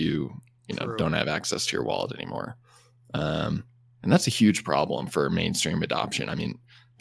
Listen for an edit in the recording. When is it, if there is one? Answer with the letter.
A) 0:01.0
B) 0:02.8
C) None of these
C